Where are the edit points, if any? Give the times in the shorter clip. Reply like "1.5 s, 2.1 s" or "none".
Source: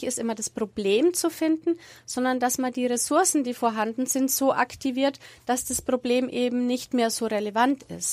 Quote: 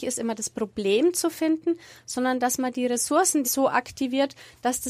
3.4 s